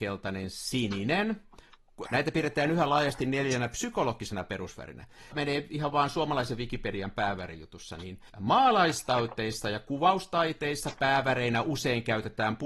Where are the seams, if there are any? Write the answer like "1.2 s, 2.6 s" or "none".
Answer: 2.0 s, 5.3 s, 8.3 s